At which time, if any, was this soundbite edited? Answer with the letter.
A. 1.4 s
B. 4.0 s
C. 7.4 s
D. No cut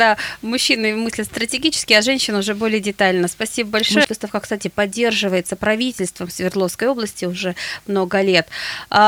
B